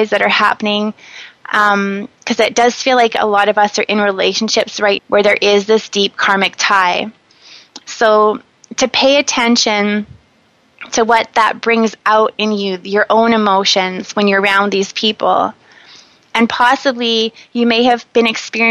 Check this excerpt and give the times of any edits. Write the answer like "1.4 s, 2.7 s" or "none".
5.0 s, 7.8 s